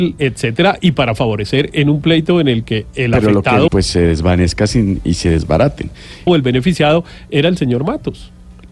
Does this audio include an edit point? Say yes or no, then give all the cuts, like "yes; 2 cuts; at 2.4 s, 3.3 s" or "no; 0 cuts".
yes; 2 cuts; at 3.7 s, 6.3 s